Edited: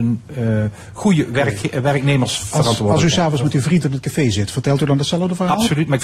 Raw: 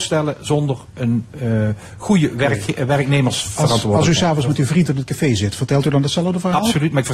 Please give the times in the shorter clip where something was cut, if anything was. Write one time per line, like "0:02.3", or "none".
none